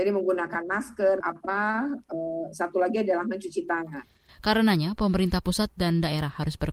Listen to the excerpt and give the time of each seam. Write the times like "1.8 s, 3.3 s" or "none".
1.2 s, 4.3 s

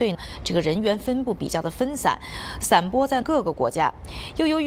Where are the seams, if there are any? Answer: none

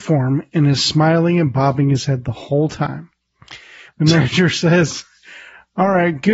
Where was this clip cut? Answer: 3.9 s

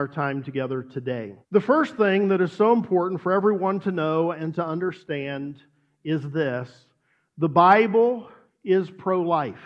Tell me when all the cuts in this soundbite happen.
1.4 s

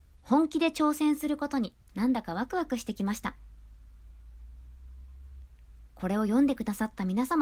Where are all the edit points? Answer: 1.8 s

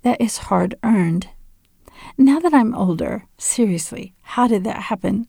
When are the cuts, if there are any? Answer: none

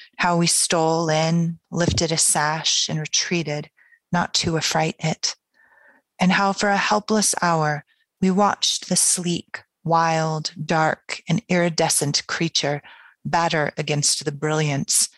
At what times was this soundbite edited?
8.1 s

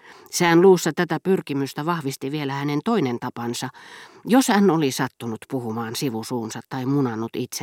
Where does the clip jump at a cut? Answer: none

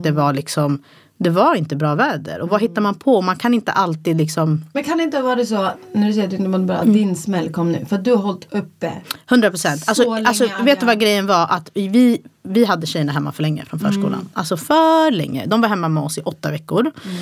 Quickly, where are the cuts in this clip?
none

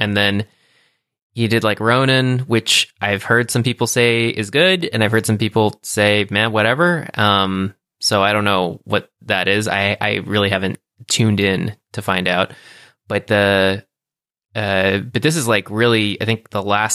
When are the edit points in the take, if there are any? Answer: none

